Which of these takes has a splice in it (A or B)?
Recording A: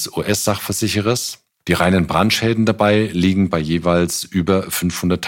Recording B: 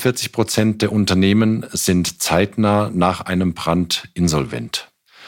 A